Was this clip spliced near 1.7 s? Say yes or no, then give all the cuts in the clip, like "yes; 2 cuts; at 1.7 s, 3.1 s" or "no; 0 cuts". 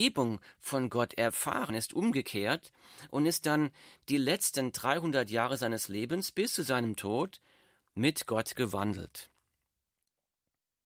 yes; 1 cut; at 1.7 s